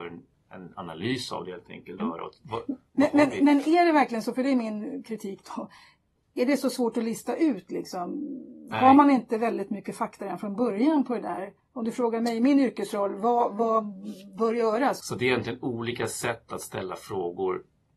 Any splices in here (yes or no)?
yes